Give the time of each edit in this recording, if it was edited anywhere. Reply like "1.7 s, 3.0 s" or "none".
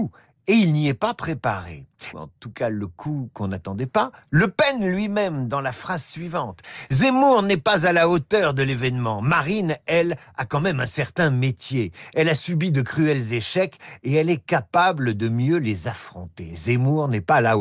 2.1 s